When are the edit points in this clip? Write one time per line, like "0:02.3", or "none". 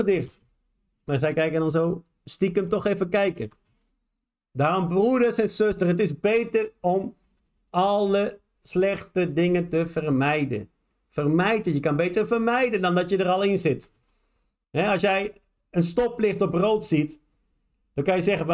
none